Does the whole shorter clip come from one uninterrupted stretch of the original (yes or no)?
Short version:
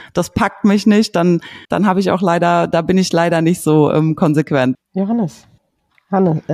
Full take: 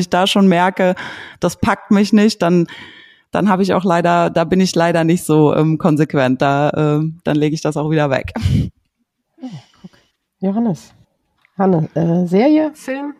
no